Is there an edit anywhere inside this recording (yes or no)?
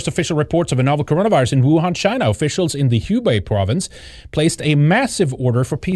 no